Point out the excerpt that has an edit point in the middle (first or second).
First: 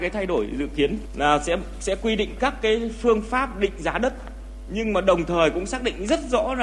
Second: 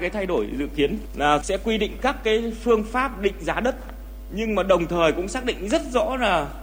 second